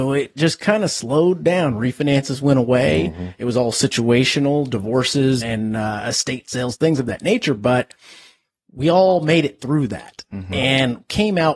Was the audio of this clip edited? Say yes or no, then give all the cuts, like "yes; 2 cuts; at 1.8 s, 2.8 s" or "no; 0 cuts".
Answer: yes; 1 cut; at 5.4 s